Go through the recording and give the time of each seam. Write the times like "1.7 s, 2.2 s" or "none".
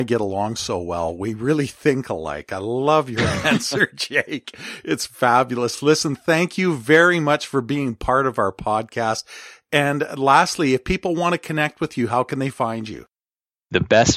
none